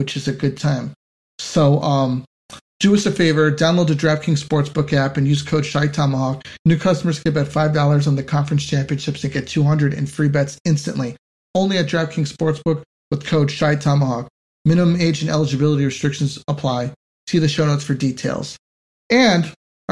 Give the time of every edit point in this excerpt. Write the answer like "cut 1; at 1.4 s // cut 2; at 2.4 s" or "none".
none